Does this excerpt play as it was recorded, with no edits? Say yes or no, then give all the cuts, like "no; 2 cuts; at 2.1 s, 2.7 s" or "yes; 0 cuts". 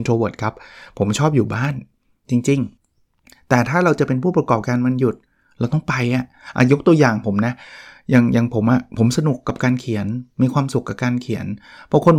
no; 1 cut; at 2.8 s